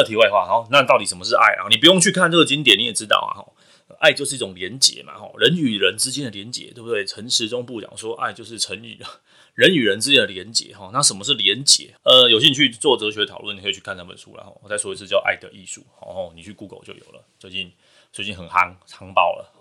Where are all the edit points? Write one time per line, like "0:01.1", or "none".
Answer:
0:12.0

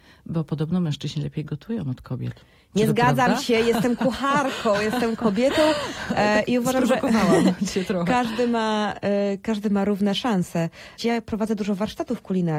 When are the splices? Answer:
0:11.0

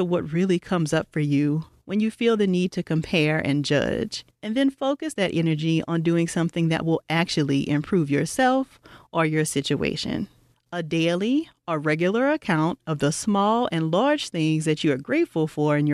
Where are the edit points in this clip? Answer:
0:04.3
0:10.5

